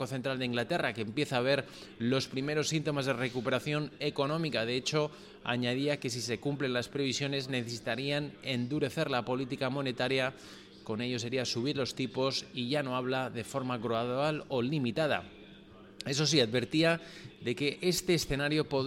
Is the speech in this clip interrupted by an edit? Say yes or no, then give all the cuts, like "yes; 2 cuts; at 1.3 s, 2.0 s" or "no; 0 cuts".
no; 0 cuts